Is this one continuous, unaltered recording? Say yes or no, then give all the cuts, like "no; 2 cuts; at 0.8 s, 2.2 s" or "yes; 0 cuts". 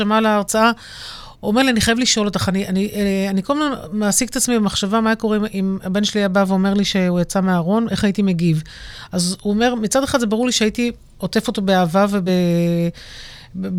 yes; 0 cuts